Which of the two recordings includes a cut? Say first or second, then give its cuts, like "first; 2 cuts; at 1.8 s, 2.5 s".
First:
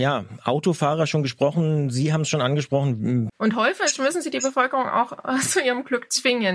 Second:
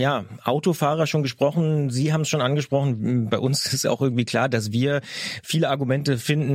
first; 1 cut; at 3.3 s